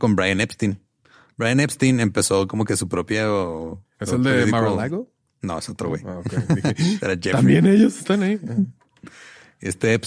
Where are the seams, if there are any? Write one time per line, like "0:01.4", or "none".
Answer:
none